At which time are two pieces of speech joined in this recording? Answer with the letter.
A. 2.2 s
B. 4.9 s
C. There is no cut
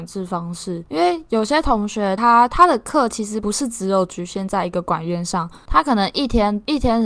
C